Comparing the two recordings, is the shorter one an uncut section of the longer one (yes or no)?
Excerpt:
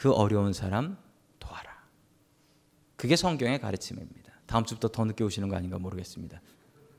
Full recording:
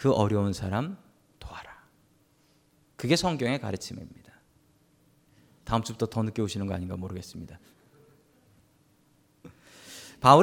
no